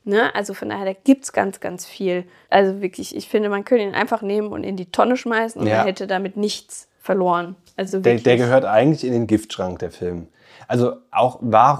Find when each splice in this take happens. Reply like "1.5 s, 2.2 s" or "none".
none